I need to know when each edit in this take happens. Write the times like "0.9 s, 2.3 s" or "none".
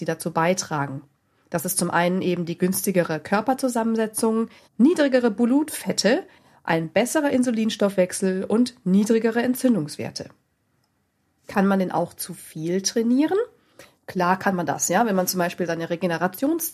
4.6 s